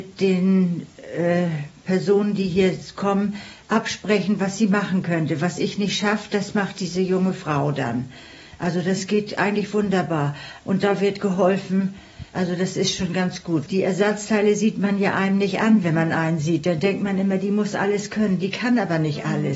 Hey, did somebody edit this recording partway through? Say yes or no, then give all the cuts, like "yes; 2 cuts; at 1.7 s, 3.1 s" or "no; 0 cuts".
yes; 3 cuts; at 10.6 s, 12.3 s, 13.7 s